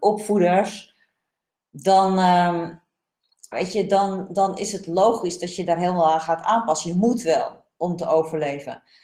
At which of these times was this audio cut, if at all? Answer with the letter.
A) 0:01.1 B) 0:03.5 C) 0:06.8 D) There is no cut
B